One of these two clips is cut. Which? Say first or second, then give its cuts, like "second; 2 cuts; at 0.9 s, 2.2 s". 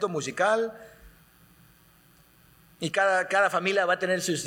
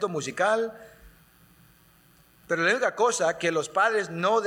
second; 1 cut; at 2.4 s